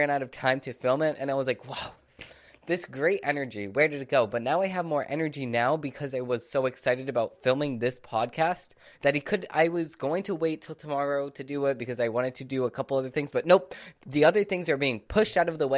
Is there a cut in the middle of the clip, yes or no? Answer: no